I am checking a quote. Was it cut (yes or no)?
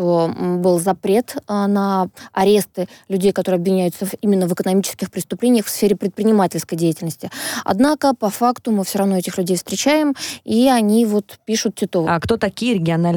yes